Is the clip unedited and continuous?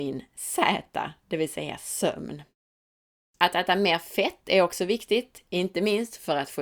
no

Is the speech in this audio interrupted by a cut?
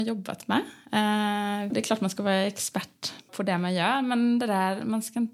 yes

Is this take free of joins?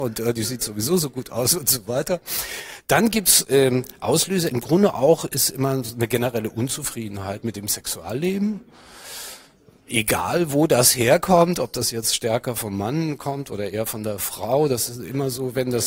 yes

